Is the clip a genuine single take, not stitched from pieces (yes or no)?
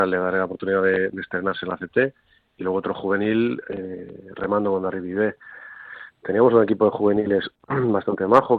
yes